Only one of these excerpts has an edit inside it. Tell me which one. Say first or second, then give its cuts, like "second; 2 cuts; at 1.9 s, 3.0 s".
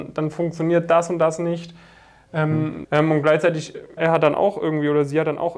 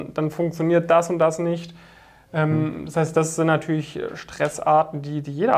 first; 2 cuts; at 2.8 s, 4.0 s